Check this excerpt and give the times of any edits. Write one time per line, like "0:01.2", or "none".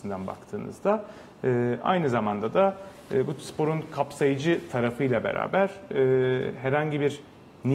none